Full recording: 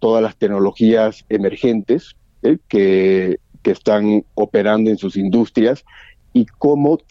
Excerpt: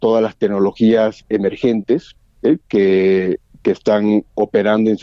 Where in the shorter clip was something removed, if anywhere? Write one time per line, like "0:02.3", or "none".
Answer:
none